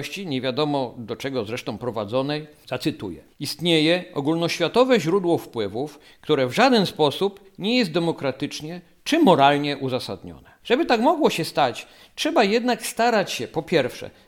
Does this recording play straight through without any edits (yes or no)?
no